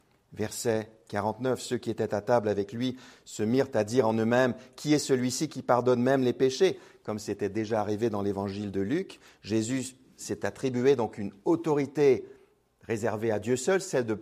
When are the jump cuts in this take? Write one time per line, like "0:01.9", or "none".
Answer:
none